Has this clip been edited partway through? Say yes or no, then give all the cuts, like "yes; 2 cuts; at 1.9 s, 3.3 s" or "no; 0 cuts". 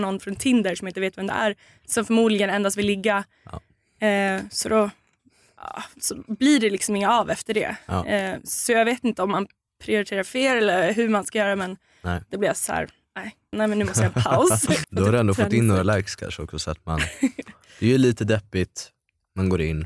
yes; 2 cuts; at 13.5 s, 14.8 s